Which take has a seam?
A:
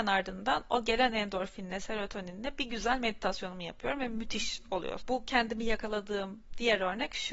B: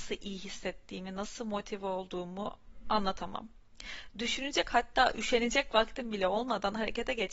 A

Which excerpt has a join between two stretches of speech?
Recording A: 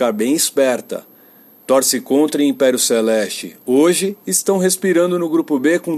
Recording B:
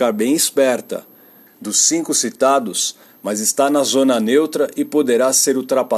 B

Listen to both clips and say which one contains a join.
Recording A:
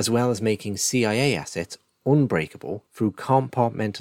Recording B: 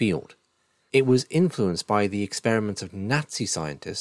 A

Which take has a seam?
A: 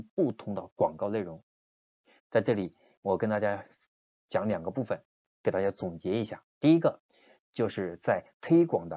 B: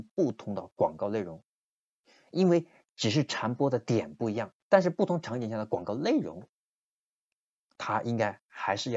A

